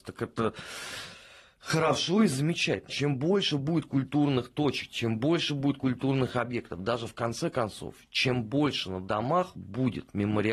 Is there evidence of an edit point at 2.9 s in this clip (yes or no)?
yes